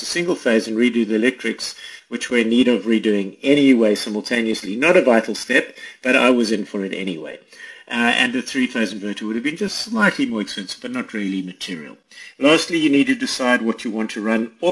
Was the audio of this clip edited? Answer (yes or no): no